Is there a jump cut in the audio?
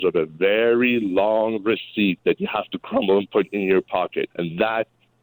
yes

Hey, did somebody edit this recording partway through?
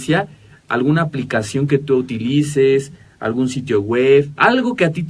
no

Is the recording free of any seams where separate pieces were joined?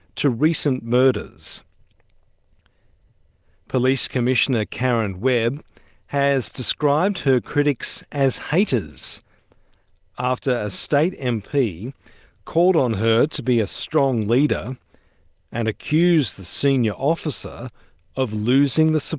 yes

